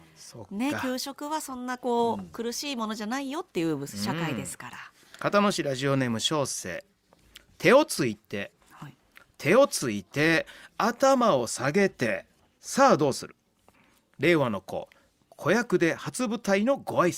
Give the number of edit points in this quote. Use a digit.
1